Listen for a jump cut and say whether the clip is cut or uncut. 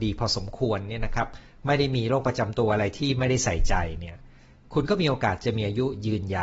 uncut